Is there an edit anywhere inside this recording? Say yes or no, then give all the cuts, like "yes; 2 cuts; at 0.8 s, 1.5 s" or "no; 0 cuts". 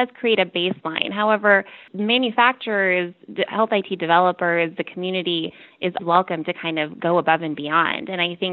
yes; 1 cut; at 6.0 s